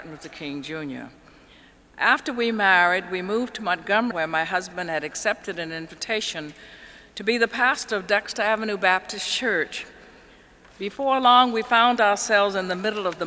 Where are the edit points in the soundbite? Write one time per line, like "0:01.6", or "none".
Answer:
0:04.1